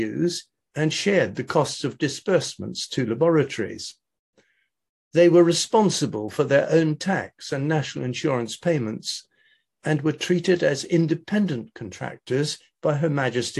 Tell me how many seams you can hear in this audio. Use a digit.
0